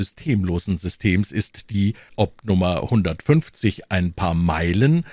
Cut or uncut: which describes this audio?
cut